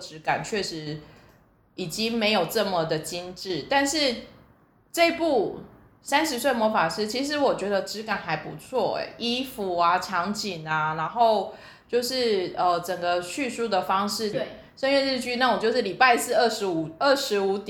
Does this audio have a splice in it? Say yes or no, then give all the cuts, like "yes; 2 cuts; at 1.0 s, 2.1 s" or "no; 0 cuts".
yes; 1 cut; at 14.3 s